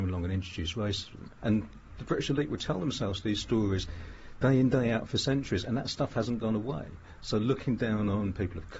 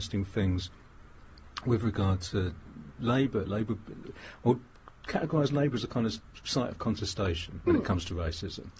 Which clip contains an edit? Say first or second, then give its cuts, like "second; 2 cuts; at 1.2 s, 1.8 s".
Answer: first; 1 cut; at 1.4 s